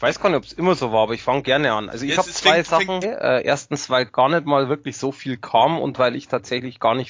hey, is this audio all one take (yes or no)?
no